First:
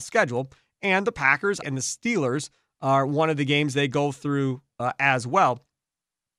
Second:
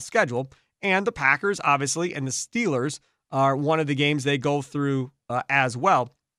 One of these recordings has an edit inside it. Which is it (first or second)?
first